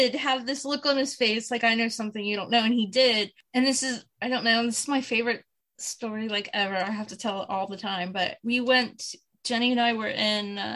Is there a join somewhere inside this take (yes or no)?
no